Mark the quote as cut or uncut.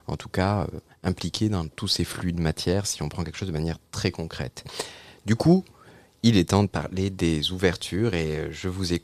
uncut